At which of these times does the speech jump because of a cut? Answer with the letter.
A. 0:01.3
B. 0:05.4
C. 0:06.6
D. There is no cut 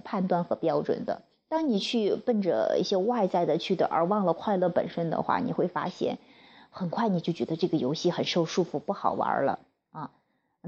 A